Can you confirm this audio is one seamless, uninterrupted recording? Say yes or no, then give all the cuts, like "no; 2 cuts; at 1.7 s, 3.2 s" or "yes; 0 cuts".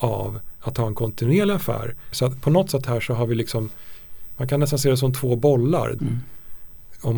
no; 2 cuts; at 2.1 s, 6.0 s